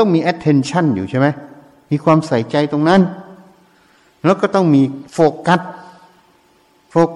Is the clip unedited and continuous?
yes; 0 cuts

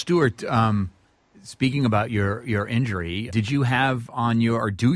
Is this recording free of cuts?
no; 1 cut; at 3.3 s

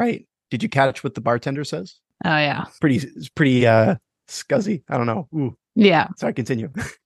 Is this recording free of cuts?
no; 1 cut; at 2.1 s

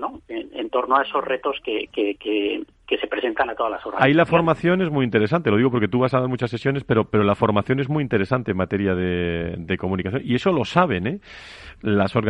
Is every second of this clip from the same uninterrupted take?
yes; 0 cuts

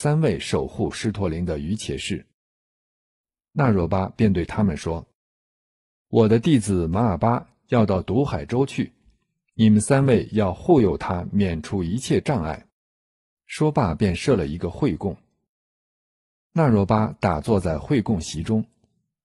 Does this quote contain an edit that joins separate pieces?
yes; 1 cut; at 13.3 s

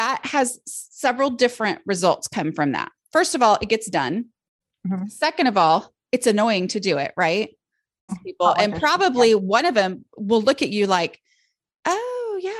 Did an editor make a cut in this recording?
yes; 1 cut; at 8.1 s

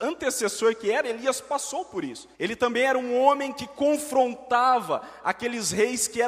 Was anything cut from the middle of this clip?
yes; 1 cut; at 2.3 s

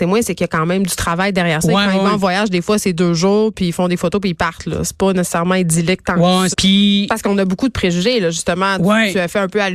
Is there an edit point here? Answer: yes; 1 cut; at 6.5 s

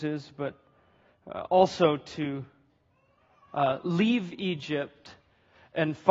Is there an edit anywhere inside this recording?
no; 0 cuts

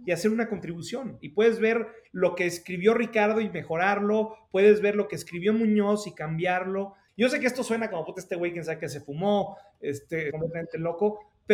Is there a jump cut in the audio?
yes; 2 cuts; at 7.1 s, 10.3 s

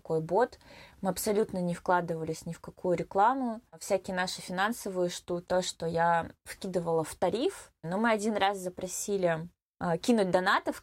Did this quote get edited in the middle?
yes; 2 cuts; at 5.5 s, 7.8 s

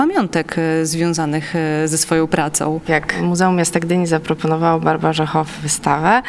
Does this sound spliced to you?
no; 0 cuts

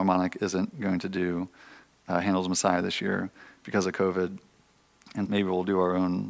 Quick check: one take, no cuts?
no; 1 cut; at 5.3 s

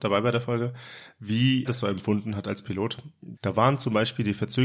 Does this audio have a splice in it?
yes; 2 cuts; at 1.7 s, 3.4 s

